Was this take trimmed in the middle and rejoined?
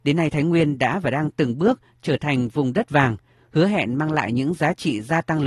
no; 0 cuts

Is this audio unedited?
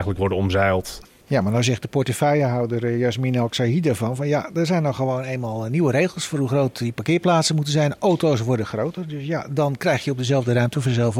yes; 0 cuts

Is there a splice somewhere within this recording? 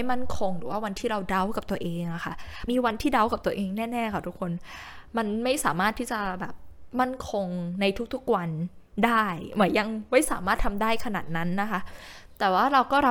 yes; 1 cut; at 2.7 s

